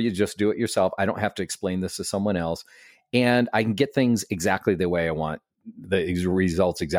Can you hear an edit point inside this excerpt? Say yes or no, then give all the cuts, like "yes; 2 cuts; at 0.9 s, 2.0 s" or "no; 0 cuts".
no; 0 cuts